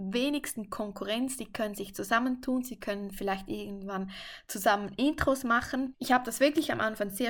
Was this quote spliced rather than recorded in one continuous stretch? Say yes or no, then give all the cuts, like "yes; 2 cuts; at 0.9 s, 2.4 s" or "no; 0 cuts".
yes; 1 cut; at 5.9 s